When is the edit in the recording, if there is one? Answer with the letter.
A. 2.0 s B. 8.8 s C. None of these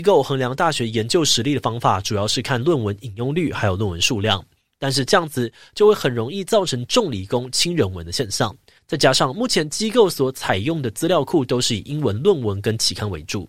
B